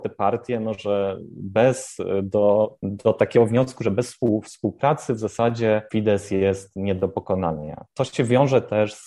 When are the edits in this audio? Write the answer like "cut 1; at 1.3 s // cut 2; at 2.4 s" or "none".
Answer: none